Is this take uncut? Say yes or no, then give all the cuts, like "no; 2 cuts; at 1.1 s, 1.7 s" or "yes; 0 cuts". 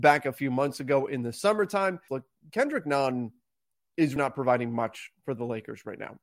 no; 2 cuts; at 2.1 s, 4.2 s